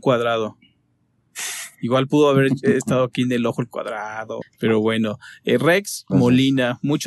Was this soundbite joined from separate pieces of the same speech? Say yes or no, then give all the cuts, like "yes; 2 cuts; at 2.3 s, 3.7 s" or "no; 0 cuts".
yes; 2 cuts; at 4.4 s, 6.1 s